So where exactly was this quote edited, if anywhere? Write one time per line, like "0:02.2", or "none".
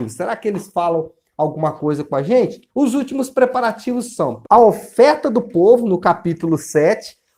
0:02.7
0:04.4